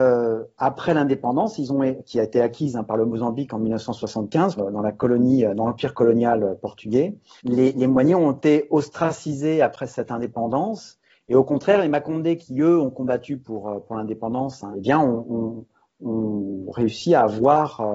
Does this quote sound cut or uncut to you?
cut